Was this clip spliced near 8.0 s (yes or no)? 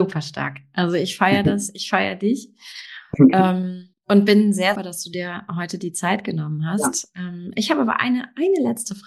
no